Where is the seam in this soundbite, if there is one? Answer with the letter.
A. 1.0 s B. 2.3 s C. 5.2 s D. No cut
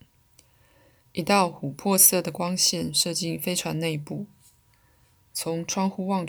A